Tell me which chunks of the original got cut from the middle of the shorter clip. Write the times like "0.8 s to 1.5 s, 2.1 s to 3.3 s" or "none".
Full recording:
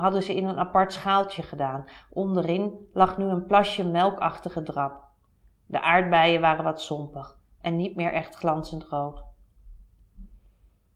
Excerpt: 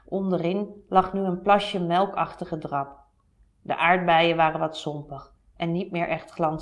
none